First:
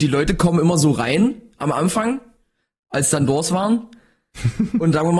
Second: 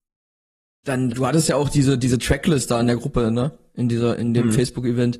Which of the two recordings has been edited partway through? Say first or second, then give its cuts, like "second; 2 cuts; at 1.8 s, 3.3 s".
second; 1 cut; at 1.1 s